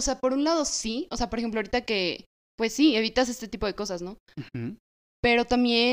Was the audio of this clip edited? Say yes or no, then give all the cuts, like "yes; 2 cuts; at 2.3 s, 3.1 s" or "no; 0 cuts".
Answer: no; 0 cuts